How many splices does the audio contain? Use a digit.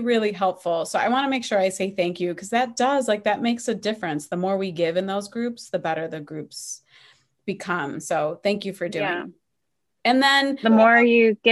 1